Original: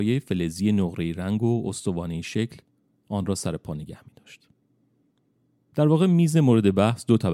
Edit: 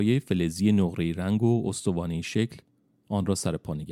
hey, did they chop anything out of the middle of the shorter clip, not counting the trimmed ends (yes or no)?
no